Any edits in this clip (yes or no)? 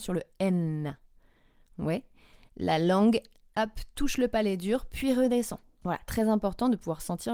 yes